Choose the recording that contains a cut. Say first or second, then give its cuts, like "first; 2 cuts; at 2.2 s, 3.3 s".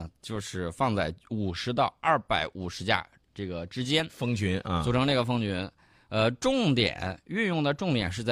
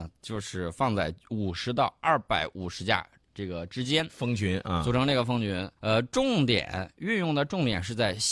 second; 1 cut; at 5.8 s